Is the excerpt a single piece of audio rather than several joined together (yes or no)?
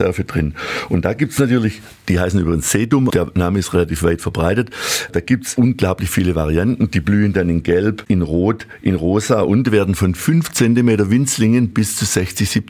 no